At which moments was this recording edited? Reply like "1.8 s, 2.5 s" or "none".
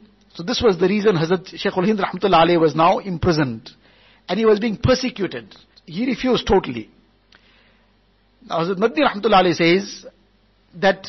5.7 s